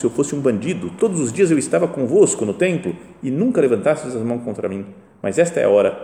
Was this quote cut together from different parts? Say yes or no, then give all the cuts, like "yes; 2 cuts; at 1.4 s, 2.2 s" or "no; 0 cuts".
no; 0 cuts